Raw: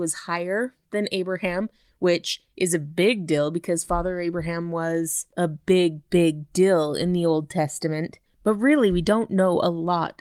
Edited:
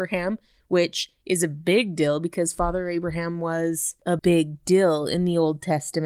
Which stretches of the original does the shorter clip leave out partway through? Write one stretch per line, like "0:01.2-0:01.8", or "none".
0:05.5-0:06.1